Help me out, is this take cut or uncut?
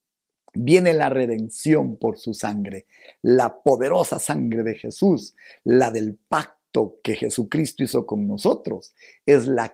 uncut